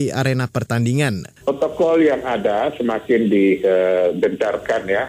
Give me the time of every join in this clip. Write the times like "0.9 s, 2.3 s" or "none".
1.4 s

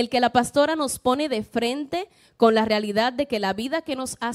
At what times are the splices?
none

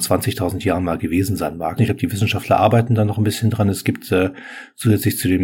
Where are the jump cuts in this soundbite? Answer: 1.8 s

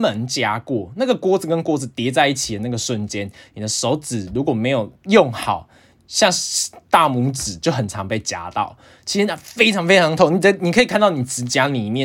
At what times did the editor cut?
none

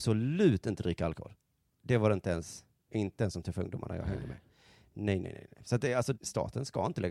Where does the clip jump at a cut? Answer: 6.1 s

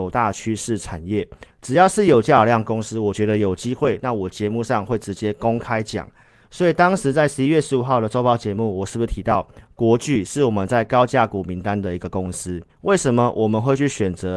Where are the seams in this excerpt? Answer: 1.5 s, 12.7 s

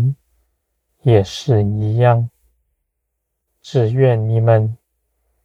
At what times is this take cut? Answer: none

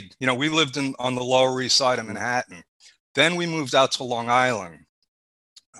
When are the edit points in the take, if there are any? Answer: none

